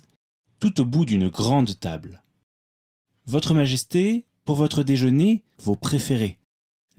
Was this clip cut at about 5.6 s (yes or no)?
yes